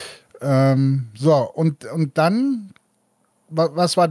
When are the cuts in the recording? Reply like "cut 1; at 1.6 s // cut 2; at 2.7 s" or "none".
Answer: none